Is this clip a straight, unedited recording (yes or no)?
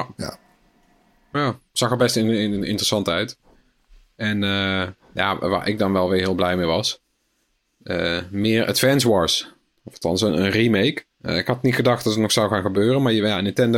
no